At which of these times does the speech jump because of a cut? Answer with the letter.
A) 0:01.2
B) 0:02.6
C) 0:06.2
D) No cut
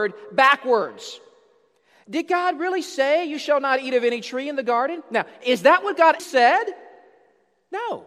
C